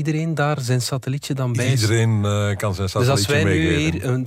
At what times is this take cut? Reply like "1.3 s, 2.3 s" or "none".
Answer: none